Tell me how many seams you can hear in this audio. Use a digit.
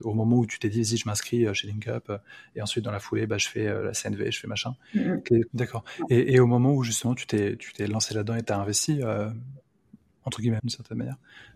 2